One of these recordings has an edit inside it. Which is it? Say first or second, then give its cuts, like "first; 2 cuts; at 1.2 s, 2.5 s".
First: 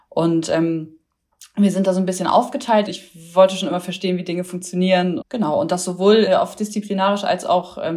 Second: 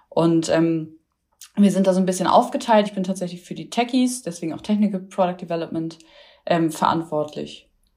first; 3 cuts; at 2.9 s, 5.2 s, 6.3 s